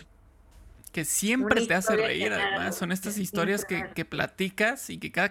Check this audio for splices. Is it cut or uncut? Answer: uncut